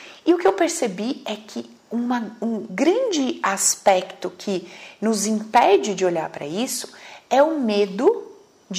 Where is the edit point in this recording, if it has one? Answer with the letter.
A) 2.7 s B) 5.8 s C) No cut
A